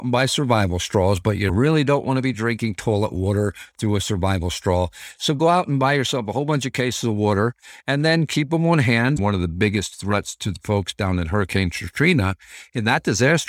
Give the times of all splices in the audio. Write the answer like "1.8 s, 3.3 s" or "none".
9.2 s